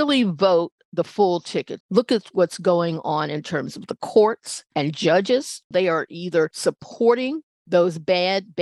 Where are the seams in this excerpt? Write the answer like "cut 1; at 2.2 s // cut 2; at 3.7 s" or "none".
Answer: cut 1; at 1.8 s // cut 2; at 5.7 s